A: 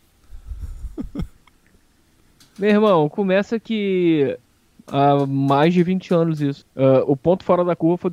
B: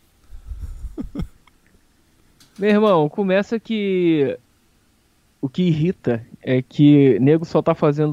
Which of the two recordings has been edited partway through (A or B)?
A